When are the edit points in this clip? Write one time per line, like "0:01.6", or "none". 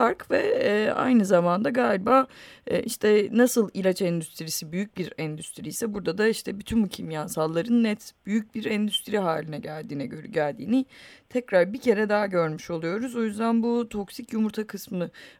none